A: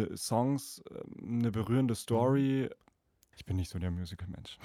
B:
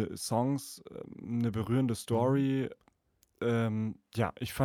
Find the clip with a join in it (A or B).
A